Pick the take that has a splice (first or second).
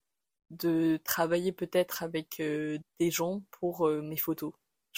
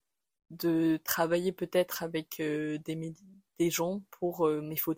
first